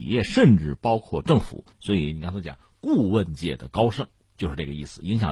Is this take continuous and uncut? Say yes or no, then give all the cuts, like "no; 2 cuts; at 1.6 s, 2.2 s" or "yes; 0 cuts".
no; 1 cut; at 1.7 s